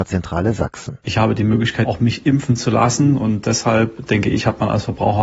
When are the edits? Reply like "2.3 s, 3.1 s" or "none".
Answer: 1.9 s